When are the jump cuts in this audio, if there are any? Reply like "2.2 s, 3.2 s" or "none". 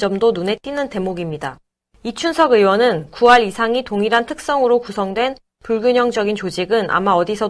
none